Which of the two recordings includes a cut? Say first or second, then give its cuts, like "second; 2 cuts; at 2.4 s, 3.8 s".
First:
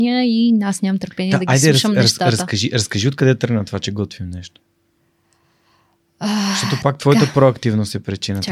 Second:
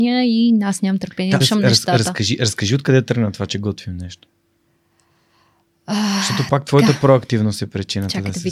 second; 1 cut; at 1.4 s